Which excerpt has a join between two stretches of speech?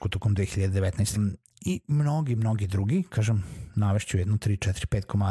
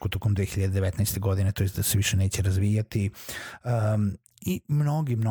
first; 1 cut; at 1.2 s

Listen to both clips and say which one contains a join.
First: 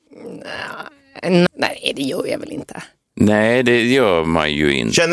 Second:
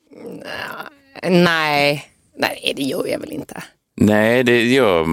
first; 1 cut; at 1.5 s

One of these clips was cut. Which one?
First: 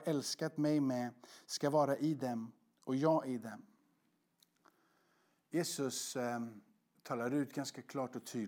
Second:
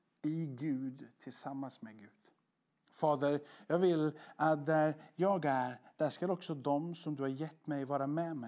second; 1 cut; at 2.7 s

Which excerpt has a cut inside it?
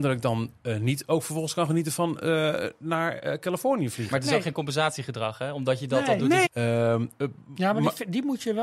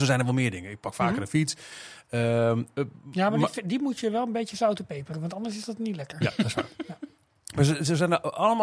first; 1 cut; at 6.5 s

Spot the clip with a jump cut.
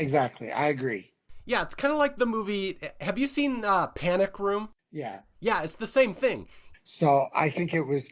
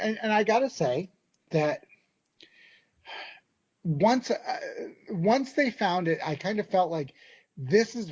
first; 2 cuts; at 4.8 s, 6.7 s

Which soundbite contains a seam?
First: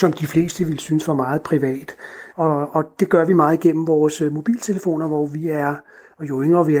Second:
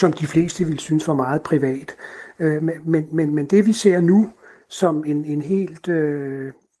first; 1 cut; at 2.3 s

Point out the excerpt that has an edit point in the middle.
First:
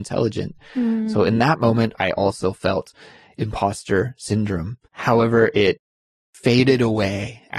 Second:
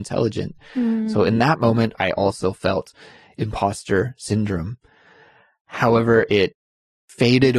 first; 1 cut; at 4.8 s

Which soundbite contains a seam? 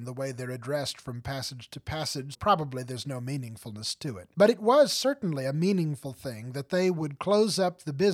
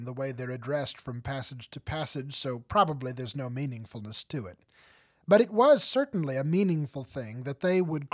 first; 2 cuts; at 2.3 s, 4.3 s

